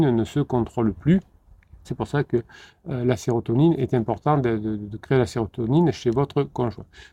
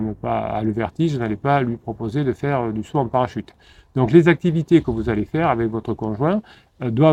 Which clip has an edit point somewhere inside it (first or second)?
first